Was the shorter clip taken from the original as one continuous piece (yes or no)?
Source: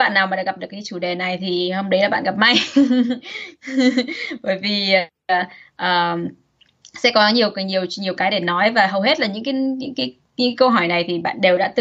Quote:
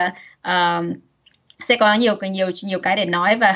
yes